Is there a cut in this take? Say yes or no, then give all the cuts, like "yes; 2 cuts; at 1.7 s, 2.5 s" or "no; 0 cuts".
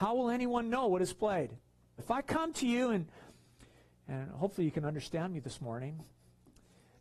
yes; 1 cut; at 2.0 s